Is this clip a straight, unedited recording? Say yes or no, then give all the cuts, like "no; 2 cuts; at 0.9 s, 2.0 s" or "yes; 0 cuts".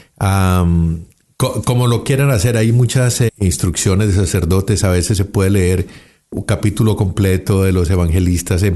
no; 1 cut; at 3.3 s